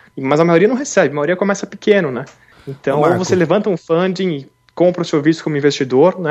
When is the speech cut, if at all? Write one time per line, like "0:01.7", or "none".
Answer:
none